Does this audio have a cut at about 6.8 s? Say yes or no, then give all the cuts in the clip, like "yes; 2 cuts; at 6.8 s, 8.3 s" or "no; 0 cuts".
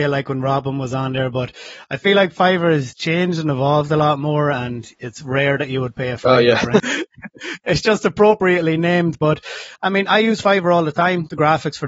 yes; 1 cut; at 6.8 s